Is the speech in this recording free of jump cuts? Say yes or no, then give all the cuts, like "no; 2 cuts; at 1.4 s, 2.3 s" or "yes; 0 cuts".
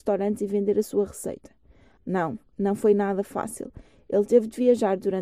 no; 1 cut; at 2.0 s